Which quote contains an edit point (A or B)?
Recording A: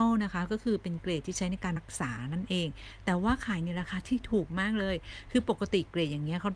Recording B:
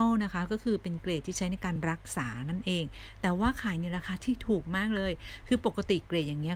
A